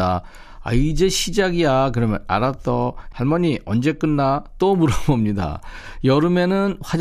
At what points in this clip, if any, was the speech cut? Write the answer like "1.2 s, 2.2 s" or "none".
3.1 s